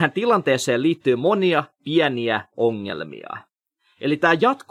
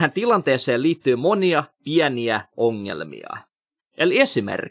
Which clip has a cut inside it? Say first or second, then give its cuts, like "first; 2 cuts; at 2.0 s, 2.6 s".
second; 1 cut; at 3.8 s